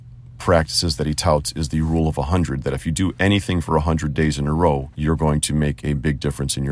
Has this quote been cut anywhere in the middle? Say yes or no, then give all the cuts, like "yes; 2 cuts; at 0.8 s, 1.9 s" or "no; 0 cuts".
yes; 1 cut; at 4.9 s